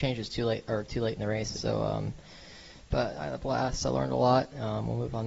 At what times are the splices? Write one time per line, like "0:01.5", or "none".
0:01.5